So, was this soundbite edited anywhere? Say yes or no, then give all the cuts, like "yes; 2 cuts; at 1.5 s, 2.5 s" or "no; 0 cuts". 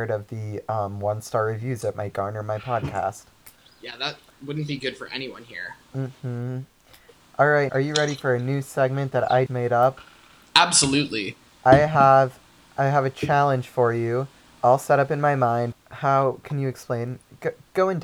yes; 3 cuts; at 7.7 s, 9.5 s, 15.7 s